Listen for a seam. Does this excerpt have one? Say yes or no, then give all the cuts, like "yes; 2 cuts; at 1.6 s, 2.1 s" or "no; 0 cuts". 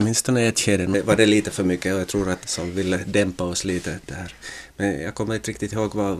yes; 1 cut; at 2.4 s